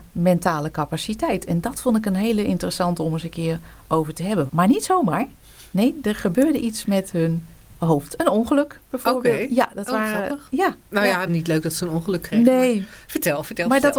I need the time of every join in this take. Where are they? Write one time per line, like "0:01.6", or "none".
0:04.5
0:11.3